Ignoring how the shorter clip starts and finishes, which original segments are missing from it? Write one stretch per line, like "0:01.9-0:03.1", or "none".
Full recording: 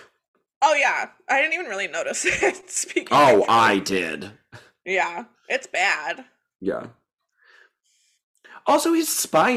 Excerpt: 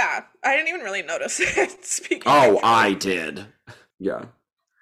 0:04.8-0:06.5